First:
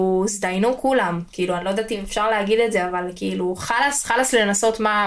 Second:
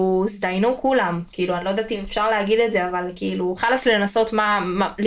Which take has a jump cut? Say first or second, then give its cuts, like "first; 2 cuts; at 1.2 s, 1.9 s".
second; 1 cut; at 3.6 s